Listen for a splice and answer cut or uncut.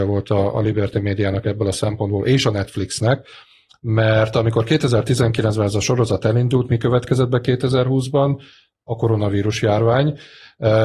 uncut